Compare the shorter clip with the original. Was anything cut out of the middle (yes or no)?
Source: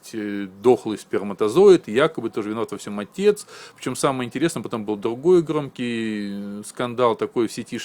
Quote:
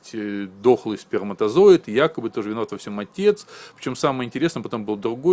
no